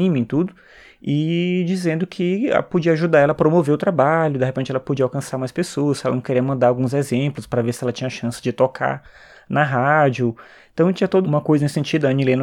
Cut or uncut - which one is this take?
cut